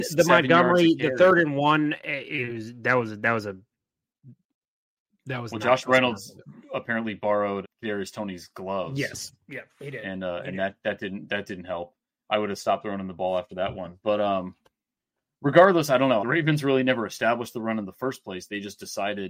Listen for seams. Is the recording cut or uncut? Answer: cut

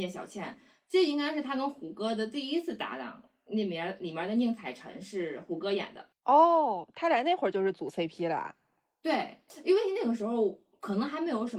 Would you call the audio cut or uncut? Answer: uncut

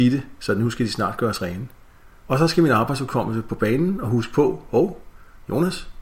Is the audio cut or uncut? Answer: cut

